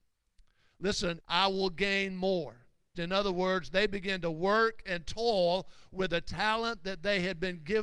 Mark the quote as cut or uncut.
cut